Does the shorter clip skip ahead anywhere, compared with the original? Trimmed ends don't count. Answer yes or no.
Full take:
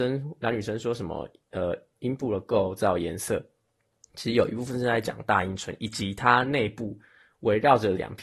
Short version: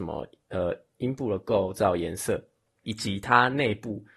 yes